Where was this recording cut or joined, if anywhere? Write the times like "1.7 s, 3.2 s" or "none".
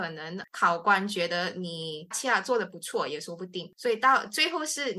2.1 s